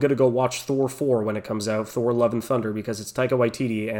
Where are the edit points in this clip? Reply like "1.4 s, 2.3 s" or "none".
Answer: none